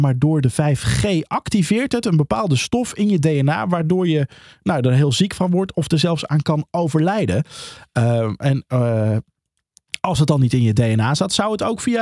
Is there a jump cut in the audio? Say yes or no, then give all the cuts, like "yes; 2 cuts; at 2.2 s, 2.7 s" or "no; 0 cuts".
no; 0 cuts